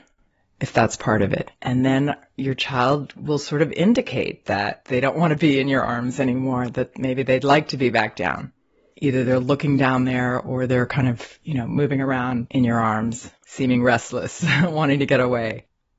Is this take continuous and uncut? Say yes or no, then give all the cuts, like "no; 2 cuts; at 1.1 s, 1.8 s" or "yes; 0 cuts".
no; 1 cut; at 1.6 s